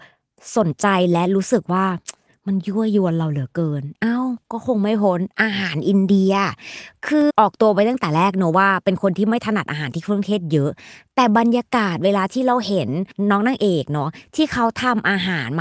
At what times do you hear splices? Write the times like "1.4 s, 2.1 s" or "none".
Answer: 7.3 s